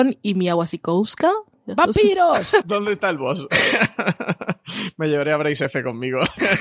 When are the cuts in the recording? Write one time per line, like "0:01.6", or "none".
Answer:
0:02.6